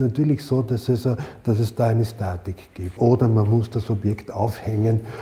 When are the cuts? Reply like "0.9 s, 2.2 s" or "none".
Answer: 3.0 s